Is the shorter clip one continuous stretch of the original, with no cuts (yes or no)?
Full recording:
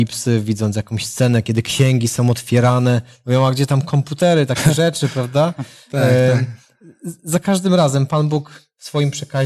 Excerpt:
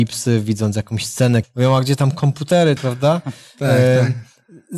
no